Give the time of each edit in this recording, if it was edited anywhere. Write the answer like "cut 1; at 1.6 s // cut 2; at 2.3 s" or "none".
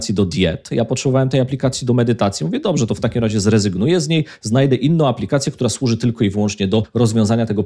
none